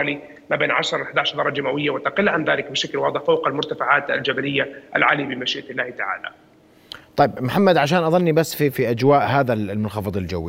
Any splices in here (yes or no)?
yes